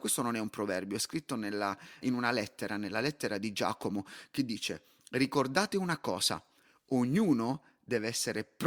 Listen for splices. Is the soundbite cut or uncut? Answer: cut